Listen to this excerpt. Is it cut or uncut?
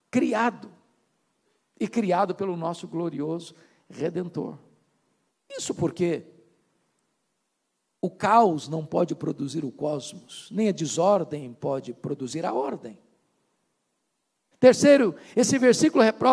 cut